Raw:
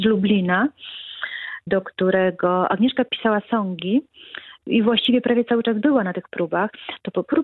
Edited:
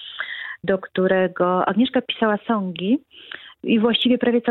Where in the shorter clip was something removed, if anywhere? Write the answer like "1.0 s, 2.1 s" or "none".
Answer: none